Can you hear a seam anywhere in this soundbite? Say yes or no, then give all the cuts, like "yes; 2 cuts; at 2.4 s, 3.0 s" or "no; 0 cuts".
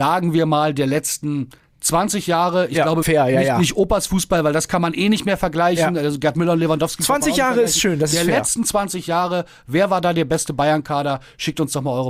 yes; 1 cut; at 3.0 s